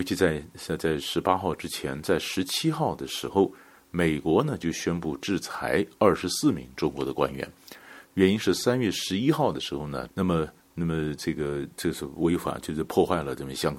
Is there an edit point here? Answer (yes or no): yes